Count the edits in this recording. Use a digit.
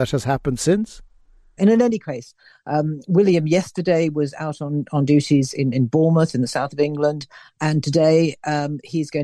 1